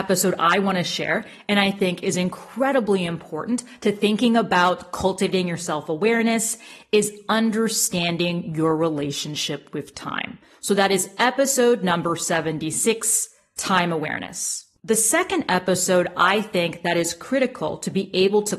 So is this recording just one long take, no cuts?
yes; 0 cuts

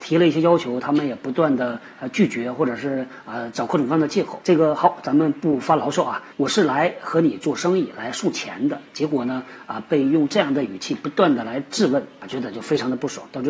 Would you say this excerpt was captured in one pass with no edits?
no; 2 cuts; at 4.4 s, 6.3 s

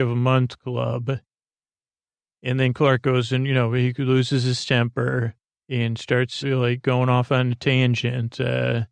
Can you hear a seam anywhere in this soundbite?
yes; 1 cut; at 6.4 s

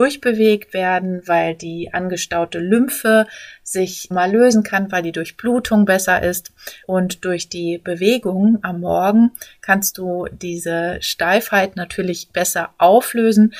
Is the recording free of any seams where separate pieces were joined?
no; 2 cuts; at 4.1 s, 6.8 s

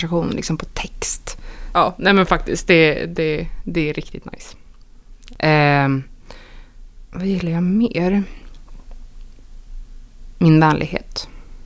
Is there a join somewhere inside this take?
yes; 1 cut; at 1.7 s

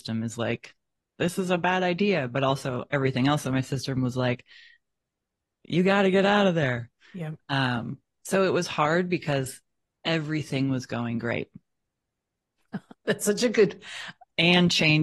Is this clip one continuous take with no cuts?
yes; 0 cuts

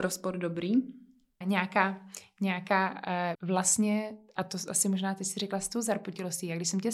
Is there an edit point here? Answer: yes; 2 cuts; at 1.4 s, 3.3 s

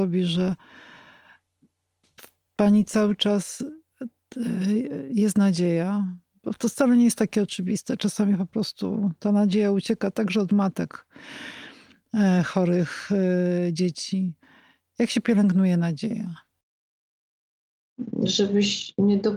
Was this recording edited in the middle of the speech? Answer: no; 0 cuts

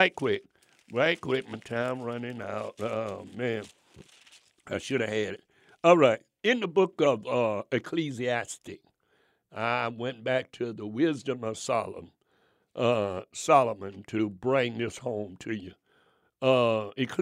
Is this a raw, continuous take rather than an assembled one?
yes; 0 cuts

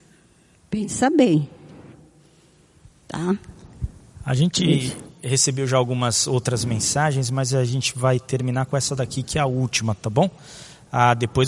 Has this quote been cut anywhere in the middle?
no; 0 cuts

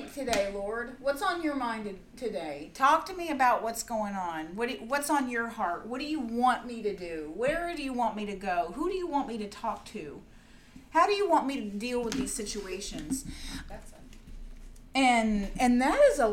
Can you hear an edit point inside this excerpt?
yes; 1 cut; at 13.7 s

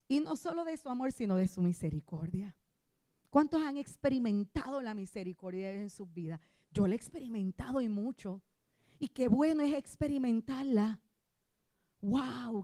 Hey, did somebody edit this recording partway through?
no; 0 cuts

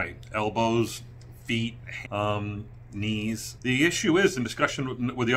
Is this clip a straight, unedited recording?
no; 2 cuts; at 2.0 s, 3.6 s

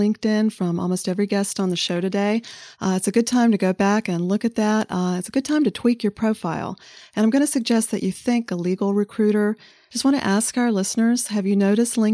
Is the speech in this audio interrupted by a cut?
yes; 3 cuts; at 2.7 s, 8.5 s, 9.9 s

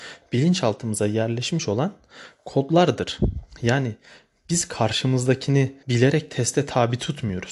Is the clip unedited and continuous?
no; 1 cut; at 5.8 s

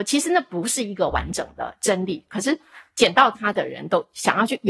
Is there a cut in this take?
no; 0 cuts

